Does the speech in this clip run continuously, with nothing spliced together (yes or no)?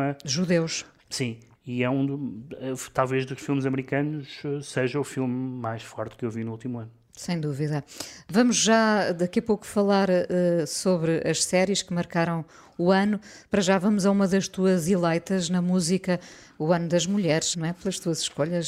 no